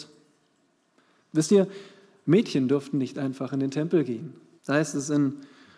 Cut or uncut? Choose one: cut